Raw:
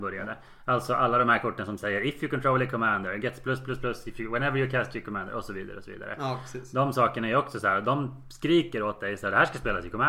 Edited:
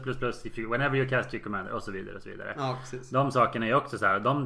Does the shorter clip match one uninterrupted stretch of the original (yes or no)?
yes